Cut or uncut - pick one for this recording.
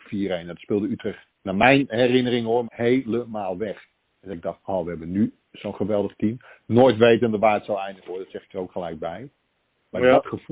cut